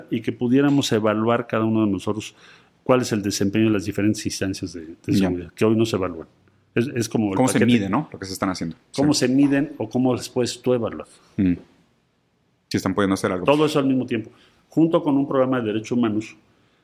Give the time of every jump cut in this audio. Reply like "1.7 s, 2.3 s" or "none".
none

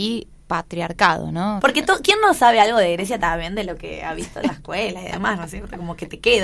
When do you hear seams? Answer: 1.6 s

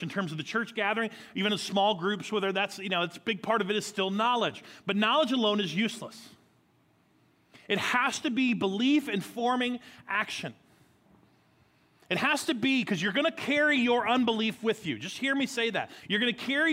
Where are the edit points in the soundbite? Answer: none

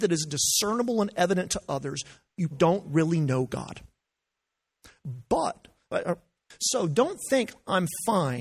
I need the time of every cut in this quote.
2.5 s

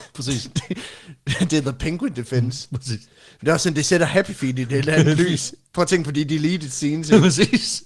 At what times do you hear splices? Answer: none

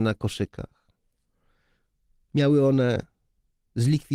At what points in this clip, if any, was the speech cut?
none

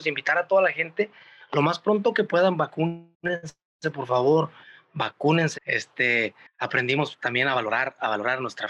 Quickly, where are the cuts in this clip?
5.5 s

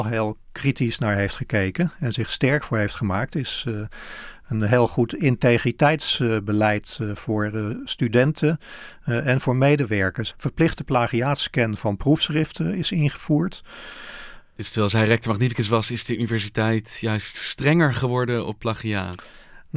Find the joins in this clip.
10.3 s, 14.4 s

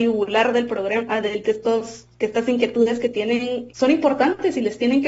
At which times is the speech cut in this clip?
1.4 s, 3.7 s

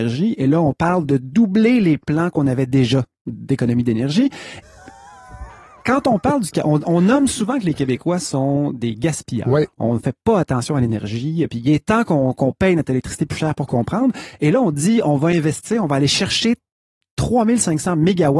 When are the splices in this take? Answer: 4.6 s

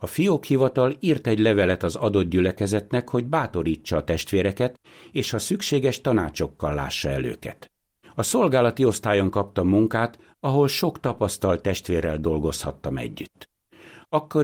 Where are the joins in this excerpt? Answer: 8.0 s

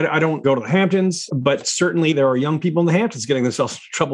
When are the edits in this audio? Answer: 1.3 s

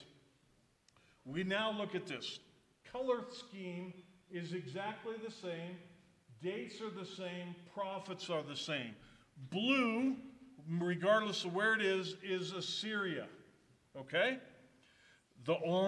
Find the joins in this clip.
none

